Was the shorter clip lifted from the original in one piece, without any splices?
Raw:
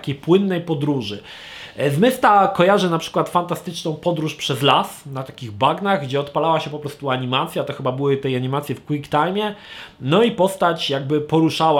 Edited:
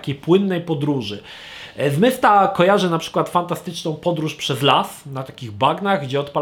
yes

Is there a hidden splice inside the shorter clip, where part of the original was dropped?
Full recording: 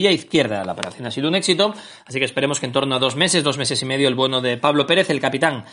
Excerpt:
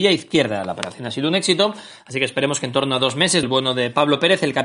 yes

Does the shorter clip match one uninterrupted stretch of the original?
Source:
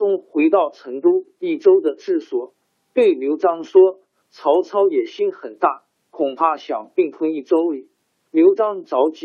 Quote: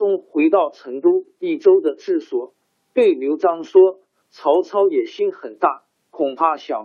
yes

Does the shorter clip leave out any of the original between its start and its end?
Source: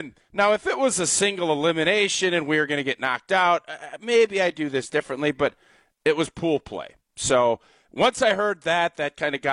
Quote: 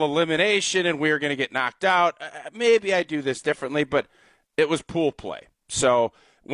no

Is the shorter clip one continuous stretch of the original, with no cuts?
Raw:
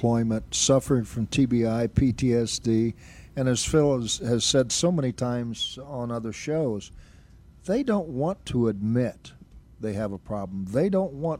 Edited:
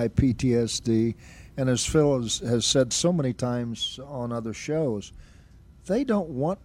yes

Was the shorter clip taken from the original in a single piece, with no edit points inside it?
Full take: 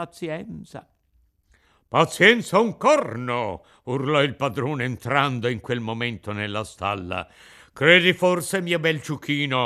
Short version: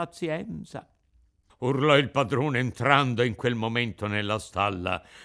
no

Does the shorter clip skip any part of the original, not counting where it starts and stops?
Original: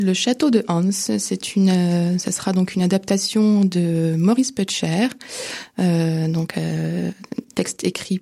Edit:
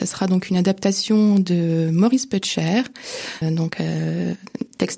yes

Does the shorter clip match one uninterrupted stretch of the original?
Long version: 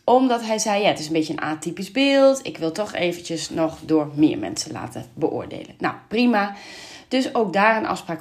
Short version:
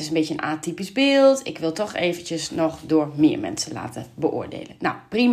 yes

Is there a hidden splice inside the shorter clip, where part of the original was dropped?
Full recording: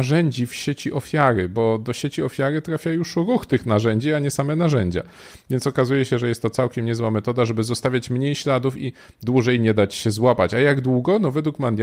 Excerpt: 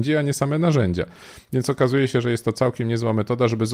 no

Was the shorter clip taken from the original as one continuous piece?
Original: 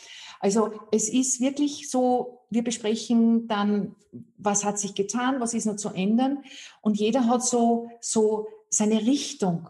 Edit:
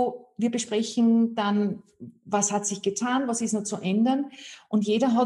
yes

